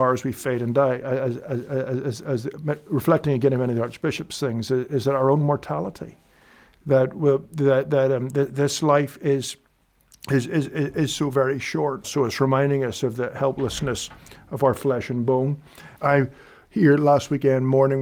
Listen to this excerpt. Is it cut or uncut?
cut